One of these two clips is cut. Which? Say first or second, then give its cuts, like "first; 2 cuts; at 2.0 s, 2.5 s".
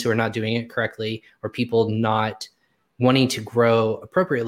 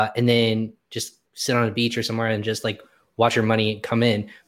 second; 1 cut; at 1.3 s